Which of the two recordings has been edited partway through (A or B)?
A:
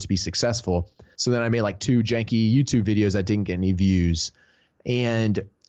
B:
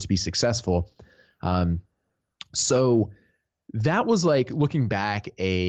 A